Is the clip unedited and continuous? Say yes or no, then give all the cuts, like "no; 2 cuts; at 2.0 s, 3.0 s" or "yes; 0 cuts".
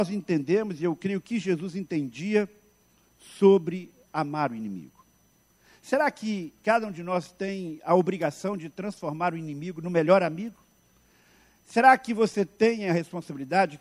yes; 0 cuts